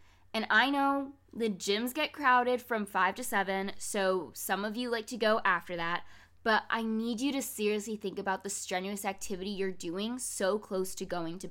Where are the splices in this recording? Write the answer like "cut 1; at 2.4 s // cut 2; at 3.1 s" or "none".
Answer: none